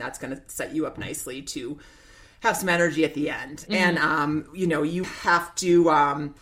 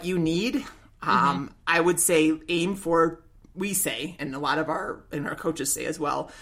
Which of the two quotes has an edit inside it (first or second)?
first